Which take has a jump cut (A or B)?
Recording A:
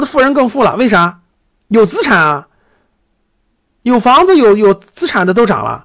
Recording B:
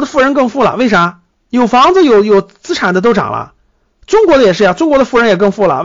B